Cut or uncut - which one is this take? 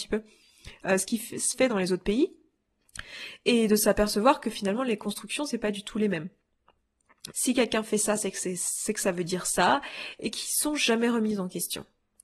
cut